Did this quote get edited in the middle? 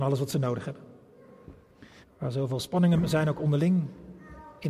yes; 1 cut; at 2.0 s

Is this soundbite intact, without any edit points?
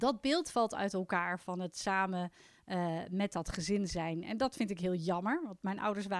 yes; 0 cuts

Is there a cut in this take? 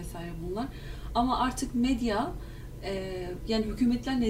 no; 0 cuts

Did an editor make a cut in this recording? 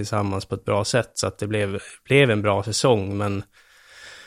no; 0 cuts

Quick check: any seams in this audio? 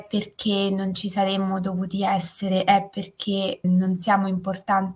yes; 1 cut; at 3.6 s

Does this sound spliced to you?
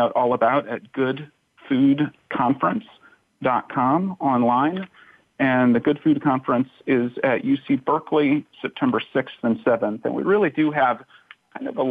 no; 0 cuts

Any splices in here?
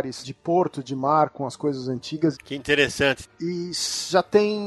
yes; 1 cut; at 2.3 s

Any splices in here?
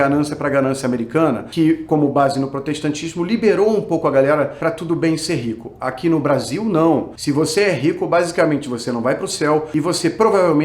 no; 0 cuts

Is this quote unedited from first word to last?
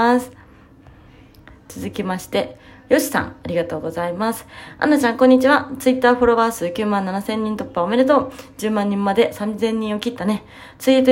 yes; 0 cuts

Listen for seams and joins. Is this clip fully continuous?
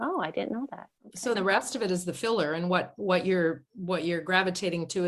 no; 1 cut; at 1.4 s

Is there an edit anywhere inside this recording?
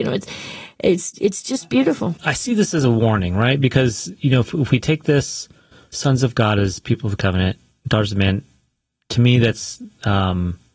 no; 0 cuts

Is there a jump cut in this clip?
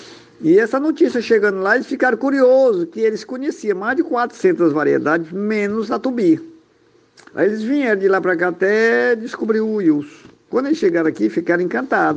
no; 0 cuts

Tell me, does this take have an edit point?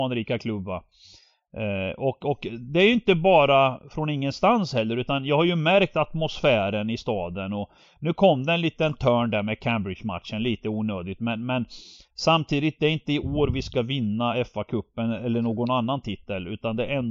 no; 0 cuts

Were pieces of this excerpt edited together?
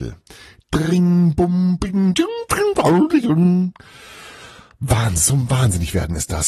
no; 0 cuts

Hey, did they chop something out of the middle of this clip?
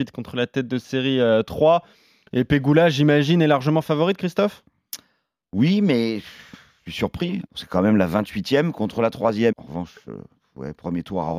yes; 2 cuts; at 7.5 s, 9.5 s

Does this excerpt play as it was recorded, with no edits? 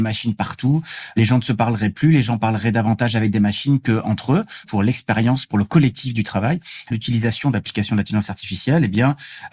no; 2 cuts; at 4.6 s, 6.9 s

